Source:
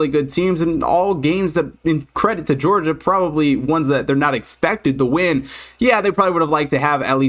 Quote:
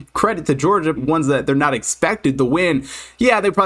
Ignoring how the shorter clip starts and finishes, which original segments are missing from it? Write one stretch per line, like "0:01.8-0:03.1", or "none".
0:03.0-0:03.6